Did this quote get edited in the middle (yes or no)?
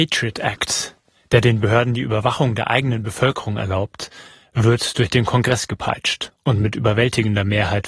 no